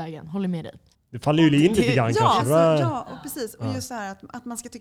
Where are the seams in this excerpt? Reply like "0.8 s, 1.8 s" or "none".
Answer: 0.9 s, 2.4 s